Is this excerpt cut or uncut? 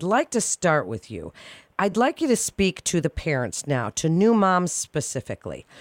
uncut